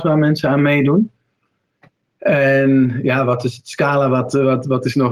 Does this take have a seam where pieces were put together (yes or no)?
no